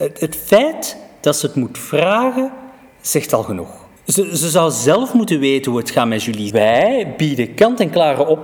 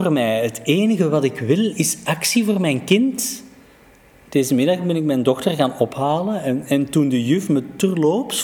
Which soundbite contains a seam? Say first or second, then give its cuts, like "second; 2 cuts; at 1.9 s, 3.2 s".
first; 2 cuts; at 4.0 s, 6.5 s